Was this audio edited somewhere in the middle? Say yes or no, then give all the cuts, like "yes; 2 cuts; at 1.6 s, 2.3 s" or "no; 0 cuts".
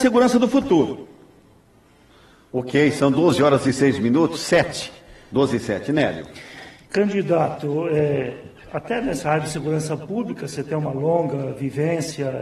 no; 0 cuts